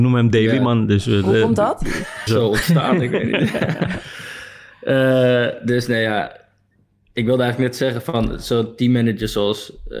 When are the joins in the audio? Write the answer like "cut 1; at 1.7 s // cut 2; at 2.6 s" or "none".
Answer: cut 1; at 2.3 s